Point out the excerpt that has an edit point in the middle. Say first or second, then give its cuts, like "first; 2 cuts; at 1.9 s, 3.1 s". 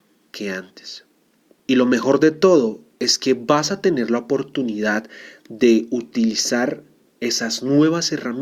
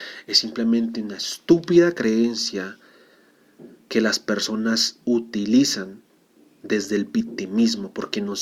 first; 1 cut; at 1.6 s